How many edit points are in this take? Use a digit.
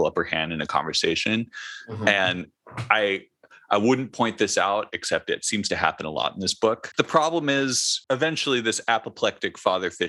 1